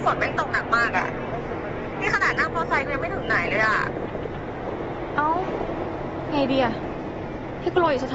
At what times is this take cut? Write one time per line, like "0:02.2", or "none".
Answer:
none